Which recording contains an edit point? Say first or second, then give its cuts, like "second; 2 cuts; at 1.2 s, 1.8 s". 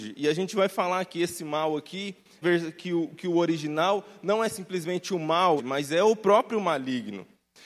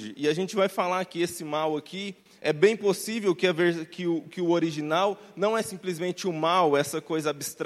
first; 2 cuts; at 2.4 s, 5.6 s